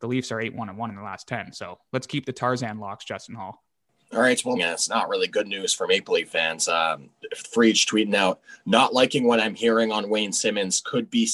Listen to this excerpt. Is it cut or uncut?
cut